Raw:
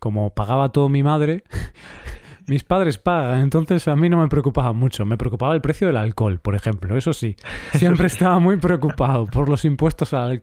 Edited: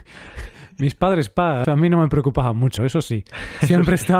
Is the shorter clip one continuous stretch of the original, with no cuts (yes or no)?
no